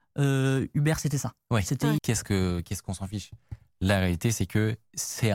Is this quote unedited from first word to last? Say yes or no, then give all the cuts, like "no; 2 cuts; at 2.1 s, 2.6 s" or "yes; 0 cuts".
no; 1 cut; at 2.0 s